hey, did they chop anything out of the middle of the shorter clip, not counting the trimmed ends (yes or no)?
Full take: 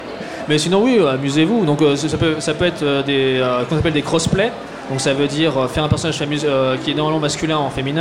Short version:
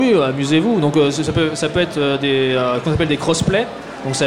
no